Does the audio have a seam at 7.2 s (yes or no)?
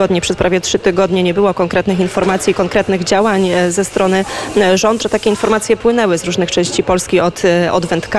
no